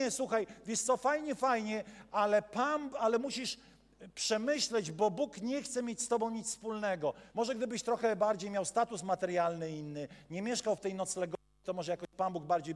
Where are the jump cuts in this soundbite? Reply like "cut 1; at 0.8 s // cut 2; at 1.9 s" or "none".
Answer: cut 1; at 7.3 s